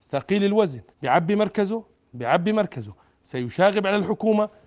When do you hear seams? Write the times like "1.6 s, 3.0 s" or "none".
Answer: 0.9 s